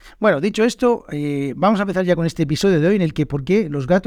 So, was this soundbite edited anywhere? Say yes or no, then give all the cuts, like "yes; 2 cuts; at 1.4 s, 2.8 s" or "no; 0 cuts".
no; 0 cuts